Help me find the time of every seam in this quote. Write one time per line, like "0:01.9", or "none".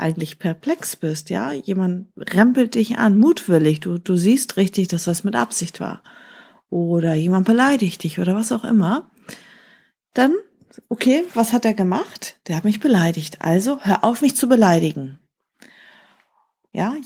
none